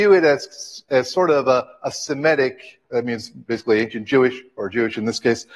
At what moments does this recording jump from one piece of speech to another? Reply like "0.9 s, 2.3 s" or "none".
none